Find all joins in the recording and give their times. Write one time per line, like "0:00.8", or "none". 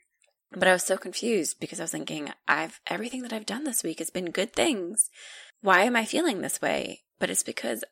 0:05.5